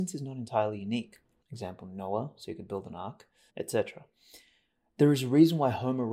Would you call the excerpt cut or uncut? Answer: cut